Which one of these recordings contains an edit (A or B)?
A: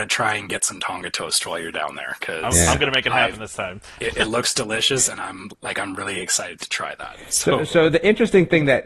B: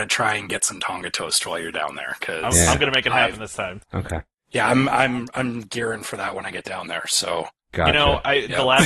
B